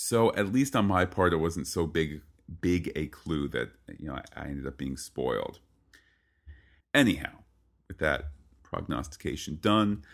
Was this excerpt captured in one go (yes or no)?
no